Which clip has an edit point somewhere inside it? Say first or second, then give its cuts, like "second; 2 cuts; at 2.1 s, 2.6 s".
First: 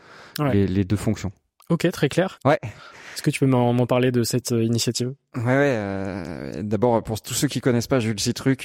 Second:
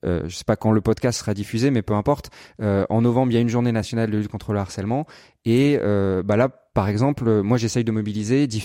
first; 1 cut; at 2.4 s